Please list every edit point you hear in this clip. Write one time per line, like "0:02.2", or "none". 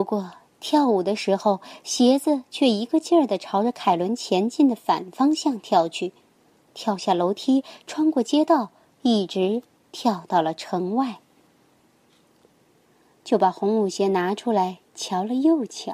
0:12.6